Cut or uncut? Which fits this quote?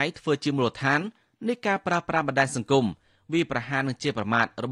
uncut